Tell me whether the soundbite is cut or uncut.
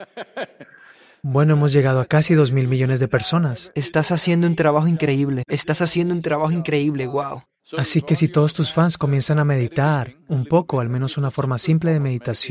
cut